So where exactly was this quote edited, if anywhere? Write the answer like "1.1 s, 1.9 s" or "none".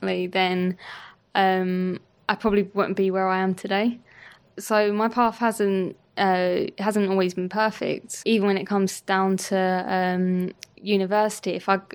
none